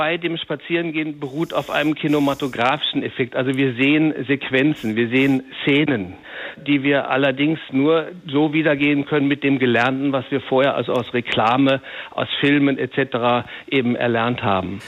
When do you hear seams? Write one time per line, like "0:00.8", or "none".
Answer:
none